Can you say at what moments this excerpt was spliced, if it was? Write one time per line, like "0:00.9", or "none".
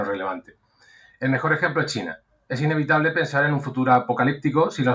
none